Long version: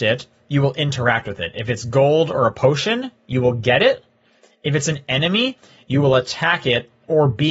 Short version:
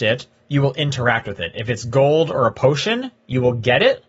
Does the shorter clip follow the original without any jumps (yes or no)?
yes